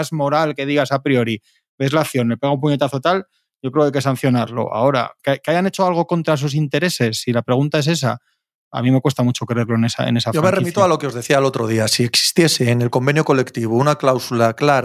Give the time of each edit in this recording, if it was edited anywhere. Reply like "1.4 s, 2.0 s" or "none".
none